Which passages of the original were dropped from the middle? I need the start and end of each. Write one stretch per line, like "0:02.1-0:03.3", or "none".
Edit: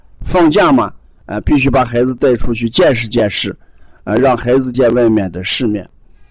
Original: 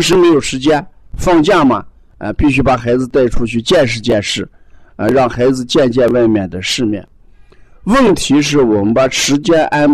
0:05.7-0:05.9